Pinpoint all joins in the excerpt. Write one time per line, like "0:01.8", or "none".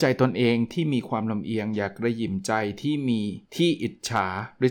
0:03.5